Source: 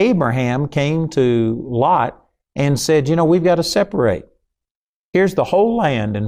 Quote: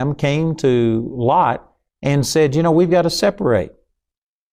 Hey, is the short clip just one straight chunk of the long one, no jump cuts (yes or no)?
yes